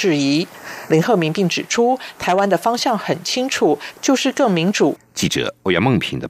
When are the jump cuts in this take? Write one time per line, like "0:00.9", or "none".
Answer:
0:05.0